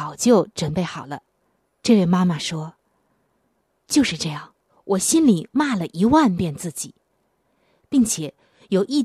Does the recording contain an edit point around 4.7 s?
yes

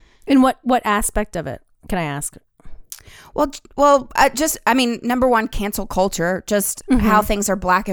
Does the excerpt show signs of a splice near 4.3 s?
no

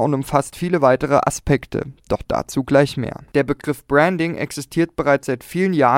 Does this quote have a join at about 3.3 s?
yes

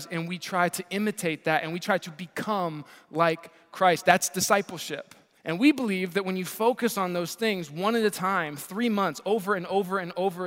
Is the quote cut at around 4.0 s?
no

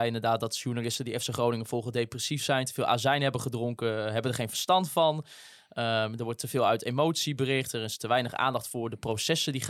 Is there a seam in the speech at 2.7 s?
no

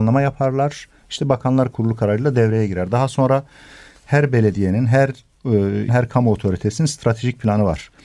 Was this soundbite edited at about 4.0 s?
no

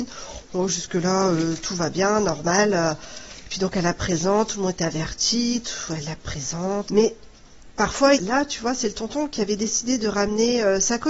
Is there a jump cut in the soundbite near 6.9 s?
yes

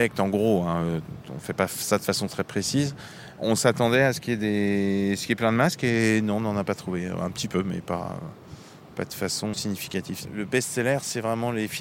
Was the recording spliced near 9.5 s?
yes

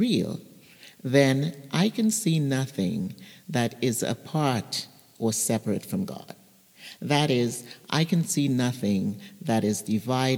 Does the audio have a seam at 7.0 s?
no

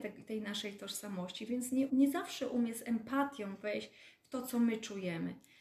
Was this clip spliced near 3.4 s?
no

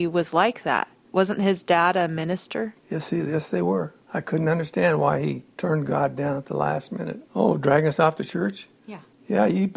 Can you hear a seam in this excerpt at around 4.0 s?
no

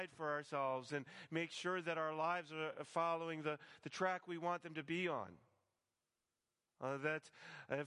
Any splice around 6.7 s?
yes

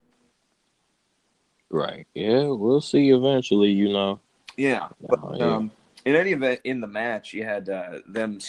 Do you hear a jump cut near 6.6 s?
yes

